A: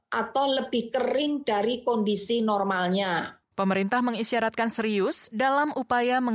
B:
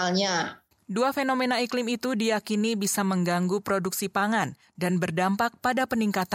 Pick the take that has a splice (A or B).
A